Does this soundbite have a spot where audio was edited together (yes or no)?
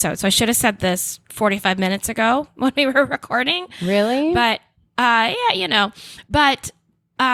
no